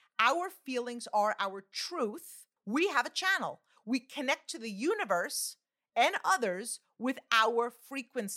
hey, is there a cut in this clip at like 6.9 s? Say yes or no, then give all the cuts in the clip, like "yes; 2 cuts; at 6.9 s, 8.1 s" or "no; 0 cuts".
no; 1 cut; at 2.6 s